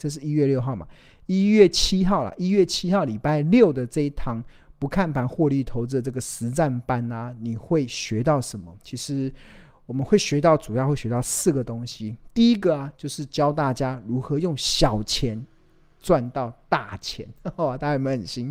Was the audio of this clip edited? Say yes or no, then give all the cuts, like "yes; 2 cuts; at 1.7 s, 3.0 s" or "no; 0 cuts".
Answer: no; 0 cuts